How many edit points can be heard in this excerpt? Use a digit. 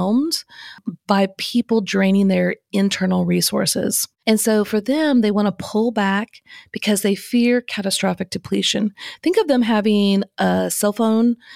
1